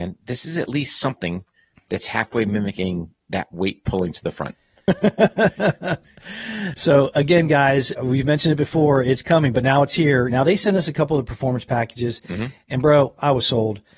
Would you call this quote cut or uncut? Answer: cut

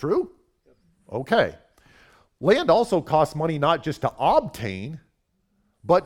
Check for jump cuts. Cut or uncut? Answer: uncut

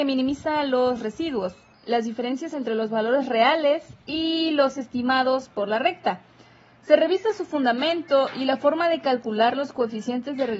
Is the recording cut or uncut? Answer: cut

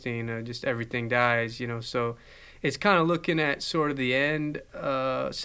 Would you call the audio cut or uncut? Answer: uncut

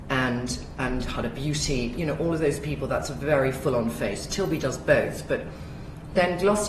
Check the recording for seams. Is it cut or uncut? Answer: uncut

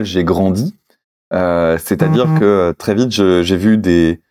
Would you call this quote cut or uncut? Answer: uncut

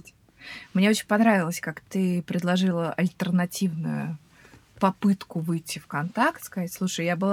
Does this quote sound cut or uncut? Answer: uncut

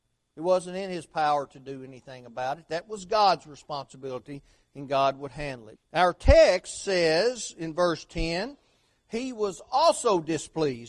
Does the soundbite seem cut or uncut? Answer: cut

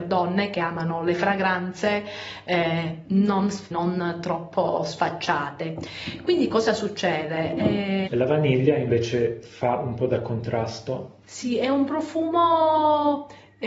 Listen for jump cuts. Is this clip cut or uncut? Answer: cut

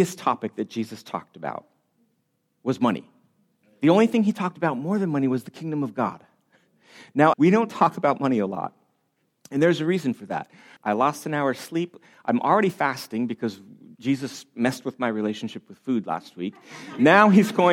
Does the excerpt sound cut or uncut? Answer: cut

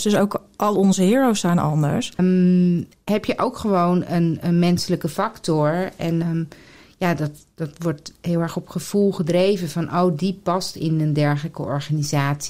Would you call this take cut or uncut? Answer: cut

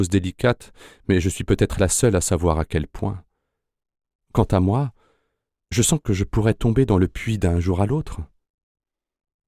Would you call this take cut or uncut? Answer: uncut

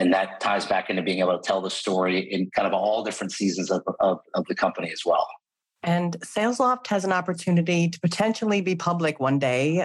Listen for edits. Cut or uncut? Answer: uncut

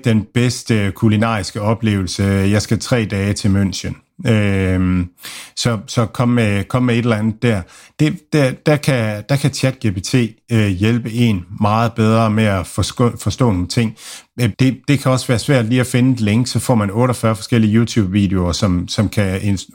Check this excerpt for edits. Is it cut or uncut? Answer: cut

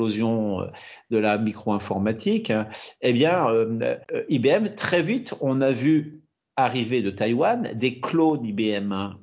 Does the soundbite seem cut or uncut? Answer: cut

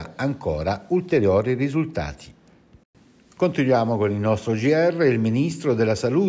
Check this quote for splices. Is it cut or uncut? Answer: uncut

